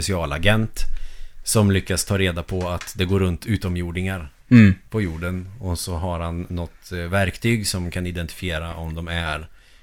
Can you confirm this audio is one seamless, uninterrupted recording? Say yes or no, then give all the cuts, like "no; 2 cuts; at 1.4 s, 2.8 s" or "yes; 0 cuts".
no; 1 cut; at 4.4 s